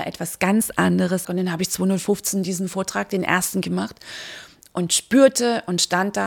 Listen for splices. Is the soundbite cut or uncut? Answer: cut